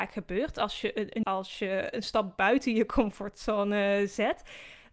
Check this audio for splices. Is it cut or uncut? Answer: cut